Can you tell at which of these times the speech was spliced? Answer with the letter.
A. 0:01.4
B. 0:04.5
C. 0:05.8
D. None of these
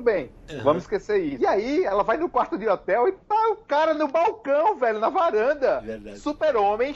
D